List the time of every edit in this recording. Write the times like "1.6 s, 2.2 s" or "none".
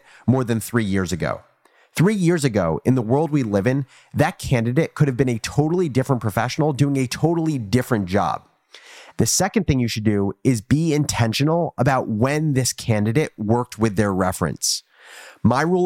9.1 s